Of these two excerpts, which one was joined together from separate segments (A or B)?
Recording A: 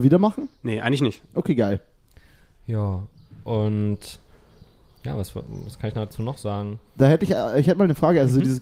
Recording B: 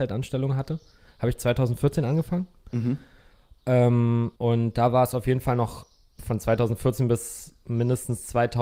B